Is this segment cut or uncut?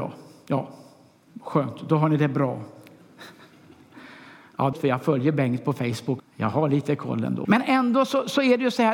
cut